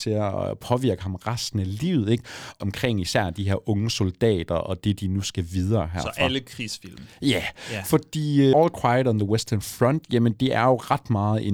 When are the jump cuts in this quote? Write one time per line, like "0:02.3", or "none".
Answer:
0:02.6
0:08.5

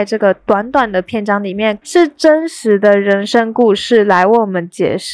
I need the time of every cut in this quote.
0:01.8

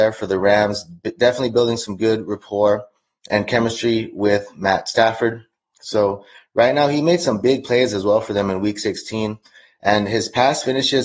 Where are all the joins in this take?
none

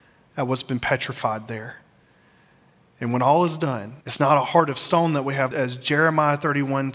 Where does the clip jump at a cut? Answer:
0:04.0
0:05.5

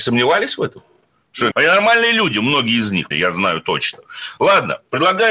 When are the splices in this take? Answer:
0:01.5
0:03.1

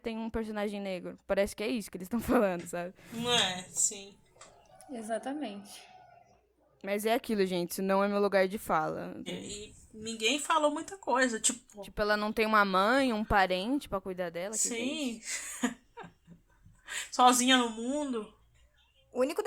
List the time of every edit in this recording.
0:09.3

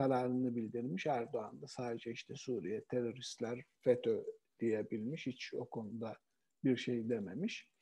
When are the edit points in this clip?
none

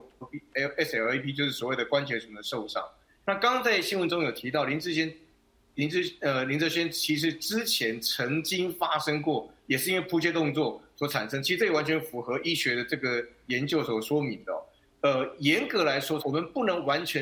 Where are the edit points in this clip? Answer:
0:14.9
0:16.2

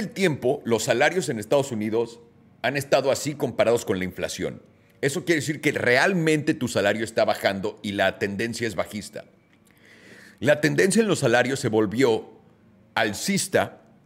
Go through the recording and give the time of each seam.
none

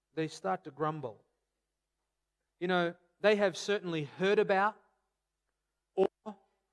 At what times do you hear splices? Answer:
0:02.5

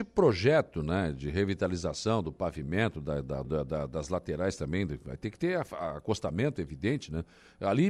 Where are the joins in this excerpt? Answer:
0:03.4

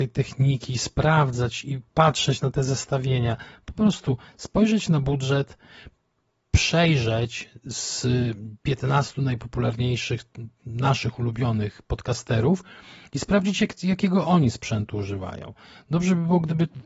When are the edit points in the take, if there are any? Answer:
0:08.6

